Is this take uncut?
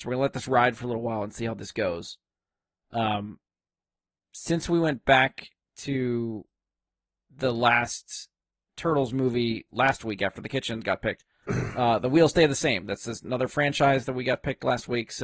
no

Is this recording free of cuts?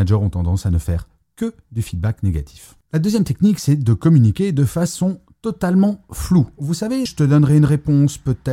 no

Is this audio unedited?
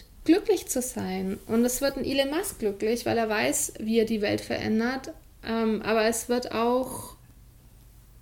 yes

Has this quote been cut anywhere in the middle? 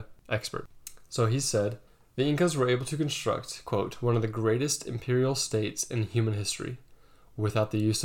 no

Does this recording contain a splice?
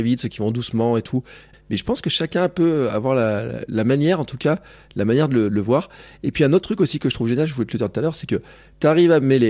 yes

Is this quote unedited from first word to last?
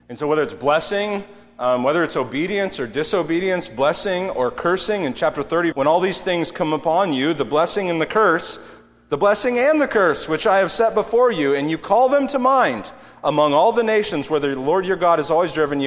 no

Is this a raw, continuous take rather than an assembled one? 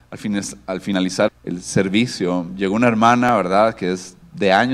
no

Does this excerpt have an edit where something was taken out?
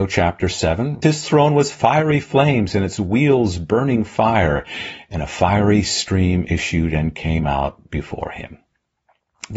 yes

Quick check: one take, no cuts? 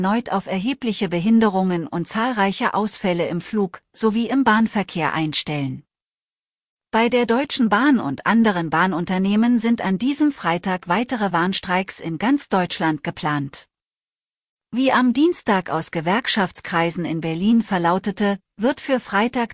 yes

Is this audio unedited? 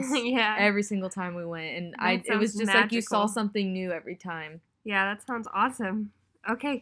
yes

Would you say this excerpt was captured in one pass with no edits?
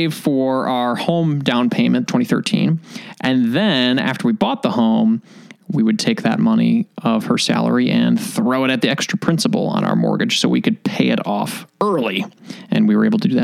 no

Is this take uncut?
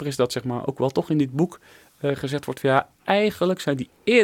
yes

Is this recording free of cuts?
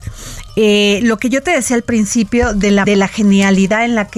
no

